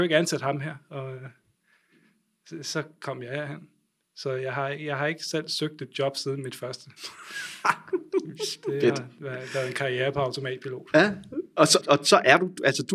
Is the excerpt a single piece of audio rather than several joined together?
no; 1 cut; at 11.8 s

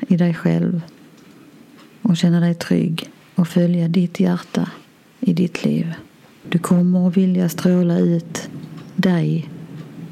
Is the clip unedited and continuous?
no; 1 cut; at 6.4 s

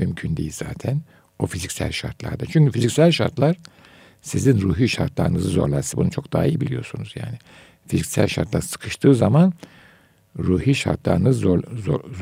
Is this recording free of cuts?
yes; 0 cuts

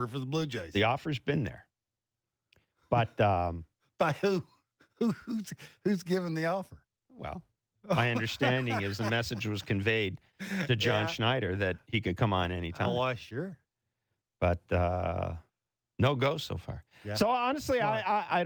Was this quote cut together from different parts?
no; 0 cuts

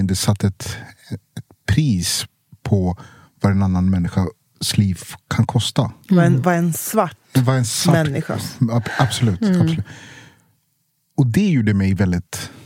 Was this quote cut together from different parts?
no; 0 cuts

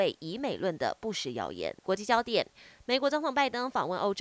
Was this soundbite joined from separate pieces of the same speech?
yes; 1 cut; at 1.8 s

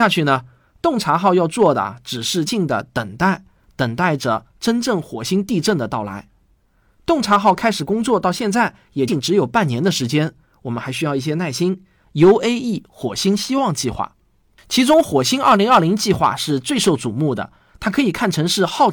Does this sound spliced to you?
yes; 3 cuts; at 2.5 s, 9.1 s, 12.0 s

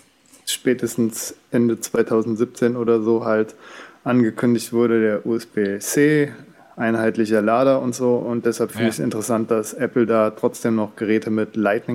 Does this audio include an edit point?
no; 0 cuts

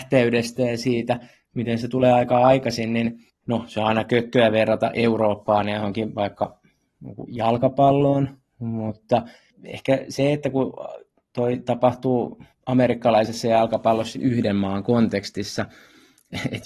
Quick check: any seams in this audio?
yes; 1 cut; at 14.1 s

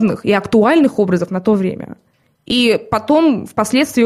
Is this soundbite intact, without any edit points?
no; 1 cut; at 2.2 s

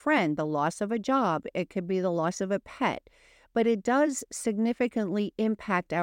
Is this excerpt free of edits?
yes; 0 cuts

